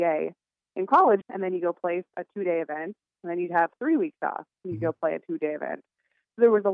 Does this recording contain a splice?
yes; 1 cut; at 1.2 s

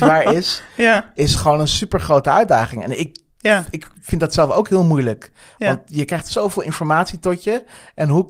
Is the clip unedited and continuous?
yes; 0 cuts

